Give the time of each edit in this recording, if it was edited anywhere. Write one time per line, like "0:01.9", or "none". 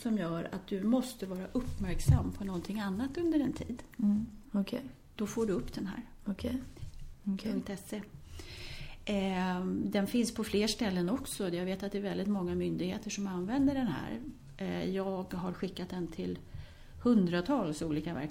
0:04.5
0:07.1